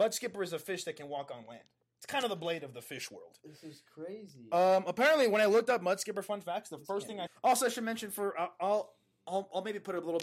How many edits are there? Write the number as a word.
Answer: one